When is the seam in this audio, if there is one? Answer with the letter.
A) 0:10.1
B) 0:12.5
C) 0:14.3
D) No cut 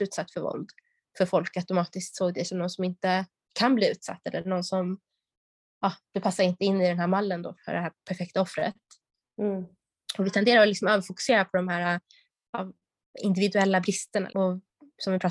C